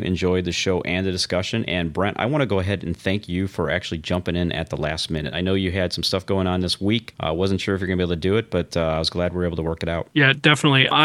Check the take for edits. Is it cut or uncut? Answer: uncut